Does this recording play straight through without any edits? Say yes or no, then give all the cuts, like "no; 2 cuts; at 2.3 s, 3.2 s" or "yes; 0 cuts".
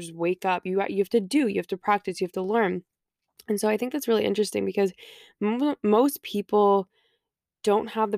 yes; 0 cuts